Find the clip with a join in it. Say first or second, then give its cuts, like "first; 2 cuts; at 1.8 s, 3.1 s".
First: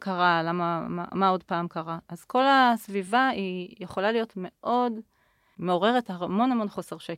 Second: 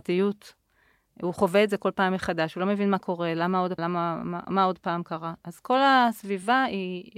second; 1 cut; at 3.8 s